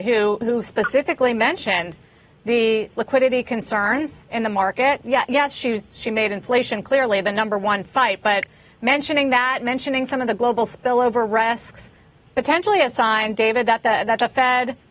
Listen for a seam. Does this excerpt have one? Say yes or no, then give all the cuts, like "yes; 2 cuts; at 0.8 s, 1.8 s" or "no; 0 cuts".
no; 0 cuts